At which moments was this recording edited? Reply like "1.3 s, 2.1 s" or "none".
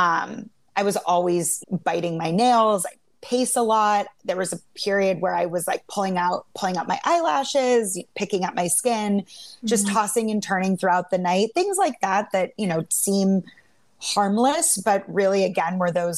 1.6 s

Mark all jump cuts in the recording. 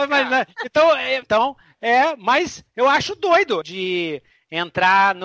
1.2 s, 3.6 s

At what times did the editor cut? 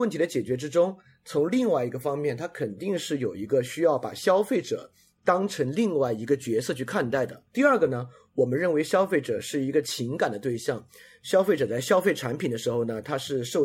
7.5 s

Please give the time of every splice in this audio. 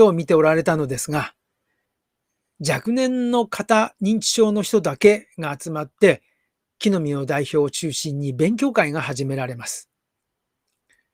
none

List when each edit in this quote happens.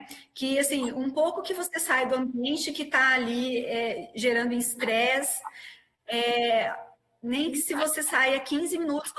none

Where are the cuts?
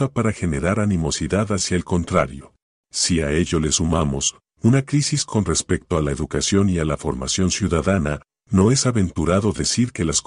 2.7 s

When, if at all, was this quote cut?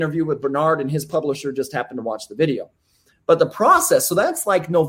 none

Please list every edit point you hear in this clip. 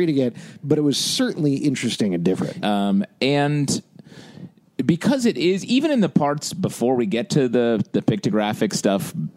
2.6 s

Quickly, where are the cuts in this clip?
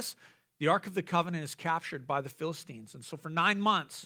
none

